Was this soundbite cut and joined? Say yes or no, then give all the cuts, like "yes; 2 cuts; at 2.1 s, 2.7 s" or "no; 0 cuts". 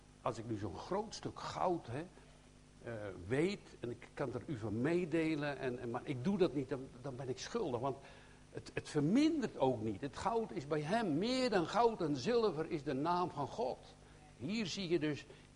no; 0 cuts